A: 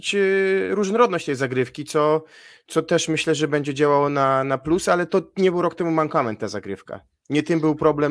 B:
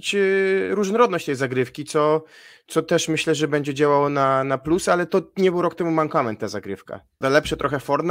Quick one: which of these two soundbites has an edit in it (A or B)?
B